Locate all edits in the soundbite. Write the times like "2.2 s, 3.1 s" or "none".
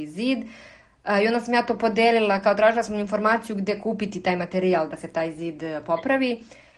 none